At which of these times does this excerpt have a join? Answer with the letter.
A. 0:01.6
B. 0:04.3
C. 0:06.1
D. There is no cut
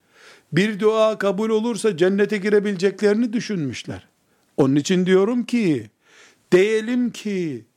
D